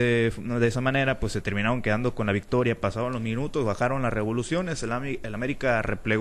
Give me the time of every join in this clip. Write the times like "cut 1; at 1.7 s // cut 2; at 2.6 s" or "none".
none

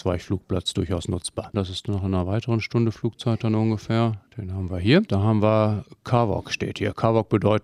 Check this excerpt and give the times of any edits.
cut 1; at 1.5 s

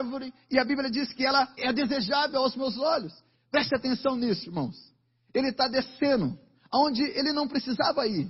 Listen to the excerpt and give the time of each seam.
cut 1; at 1.6 s // cut 2; at 3.3 s

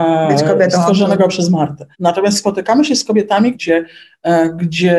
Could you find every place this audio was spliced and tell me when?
cut 1; at 1.9 s // cut 2; at 3.5 s

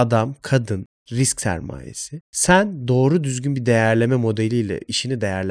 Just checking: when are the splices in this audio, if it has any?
cut 1; at 2.2 s

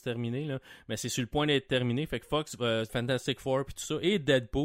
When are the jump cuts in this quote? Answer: cut 1; at 2.9 s

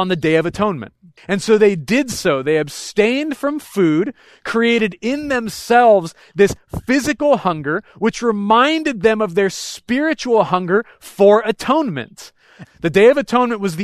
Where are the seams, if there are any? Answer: cut 1; at 1.2 s // cut 2; at 12.6 s

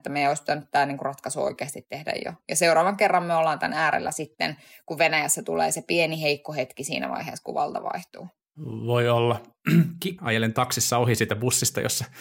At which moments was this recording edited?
cut 1; at 10.2 s

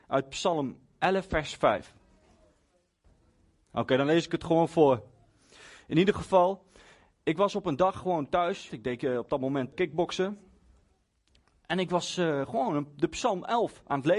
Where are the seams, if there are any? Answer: cut 1; at 8.7 s // cut 2; at 9.7 s

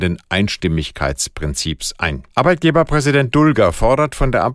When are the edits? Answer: cut 1; at 2.3 s

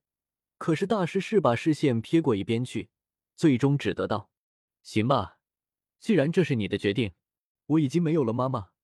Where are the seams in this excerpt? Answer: cut 1; at 7.6 s

